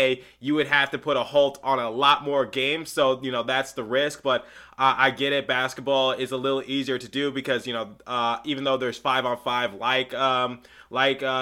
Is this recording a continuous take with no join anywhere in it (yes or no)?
yes